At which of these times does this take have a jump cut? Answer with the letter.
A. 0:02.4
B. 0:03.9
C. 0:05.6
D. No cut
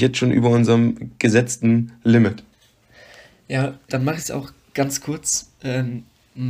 B